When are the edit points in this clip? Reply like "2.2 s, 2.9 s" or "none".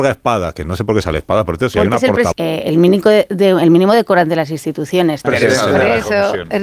2.3 s, 5.2 s